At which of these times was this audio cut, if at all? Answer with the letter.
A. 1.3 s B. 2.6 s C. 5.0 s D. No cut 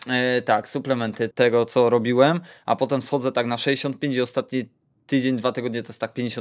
A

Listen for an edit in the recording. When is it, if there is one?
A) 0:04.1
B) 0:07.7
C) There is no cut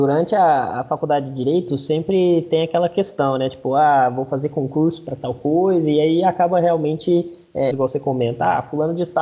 B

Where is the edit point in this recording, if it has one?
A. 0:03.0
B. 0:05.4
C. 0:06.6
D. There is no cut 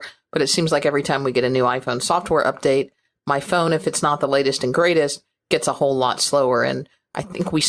D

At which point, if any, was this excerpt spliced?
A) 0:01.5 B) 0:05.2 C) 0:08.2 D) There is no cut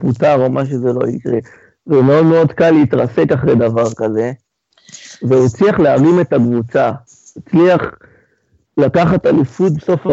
D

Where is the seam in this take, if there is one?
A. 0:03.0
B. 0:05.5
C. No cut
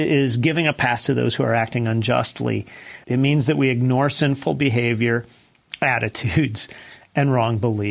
A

